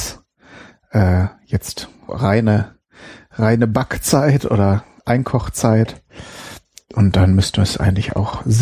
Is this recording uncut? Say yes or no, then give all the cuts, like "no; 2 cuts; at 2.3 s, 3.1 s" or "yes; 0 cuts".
no; 1 cut; at 2.1 s